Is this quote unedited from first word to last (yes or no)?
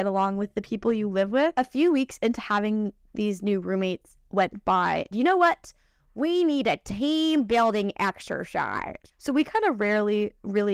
no